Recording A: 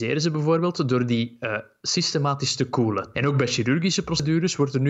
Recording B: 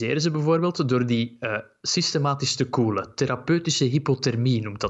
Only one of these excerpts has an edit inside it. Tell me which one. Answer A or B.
A